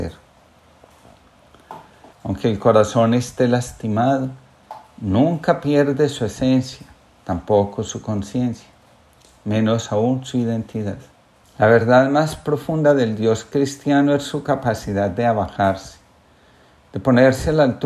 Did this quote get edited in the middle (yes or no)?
yes